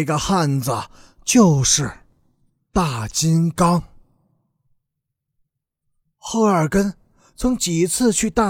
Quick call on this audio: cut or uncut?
uncut